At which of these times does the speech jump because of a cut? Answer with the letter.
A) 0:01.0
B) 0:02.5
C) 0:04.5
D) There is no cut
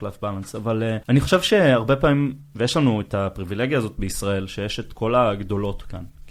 A